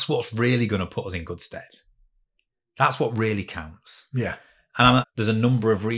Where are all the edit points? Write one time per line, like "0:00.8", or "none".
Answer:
0:05.0